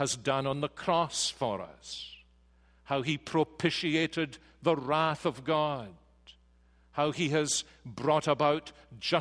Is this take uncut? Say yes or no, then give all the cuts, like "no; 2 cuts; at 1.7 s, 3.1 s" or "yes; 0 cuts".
yes; 0 cuts